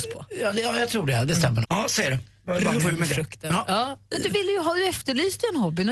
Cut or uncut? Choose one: cut